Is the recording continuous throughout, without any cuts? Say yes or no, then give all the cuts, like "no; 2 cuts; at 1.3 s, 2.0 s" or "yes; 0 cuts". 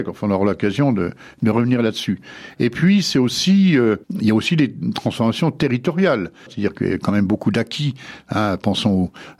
no; 2 cuts; at 4.0 s, 6.5 s